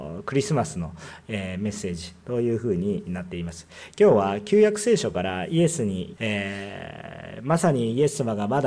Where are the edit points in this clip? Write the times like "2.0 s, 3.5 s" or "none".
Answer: 6.2 s